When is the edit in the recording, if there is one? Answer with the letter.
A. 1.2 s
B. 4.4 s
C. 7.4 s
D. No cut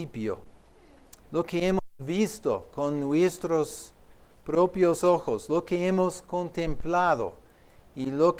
A